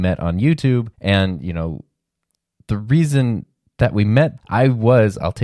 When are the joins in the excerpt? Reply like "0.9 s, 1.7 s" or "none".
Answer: 0.9 s, 4.4 s